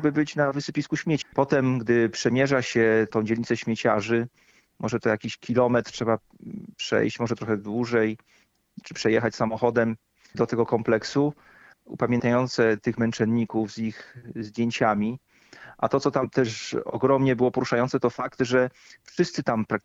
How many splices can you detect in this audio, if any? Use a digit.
3